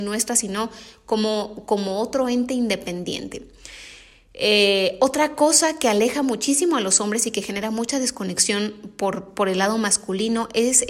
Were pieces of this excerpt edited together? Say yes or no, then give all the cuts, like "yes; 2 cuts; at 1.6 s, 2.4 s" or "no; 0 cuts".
no; 0 cuts